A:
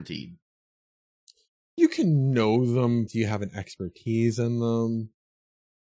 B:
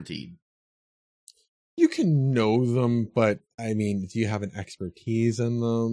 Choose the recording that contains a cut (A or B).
A